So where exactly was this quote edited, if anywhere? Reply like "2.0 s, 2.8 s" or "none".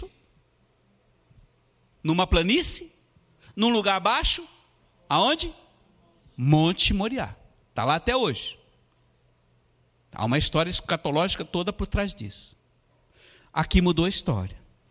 none